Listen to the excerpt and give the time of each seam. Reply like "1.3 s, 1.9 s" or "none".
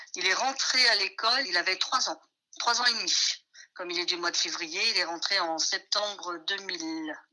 1.4 s